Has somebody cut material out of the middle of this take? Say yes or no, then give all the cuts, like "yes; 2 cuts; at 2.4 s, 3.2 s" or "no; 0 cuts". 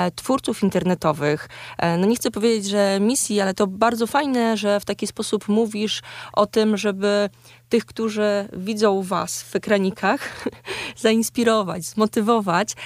no; 0 cuts